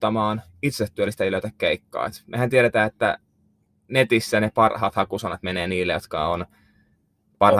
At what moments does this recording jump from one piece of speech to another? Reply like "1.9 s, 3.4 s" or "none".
none